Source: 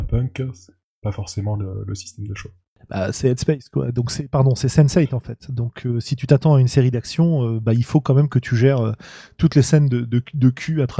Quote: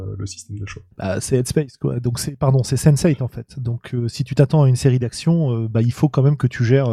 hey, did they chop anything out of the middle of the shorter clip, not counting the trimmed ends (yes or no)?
yes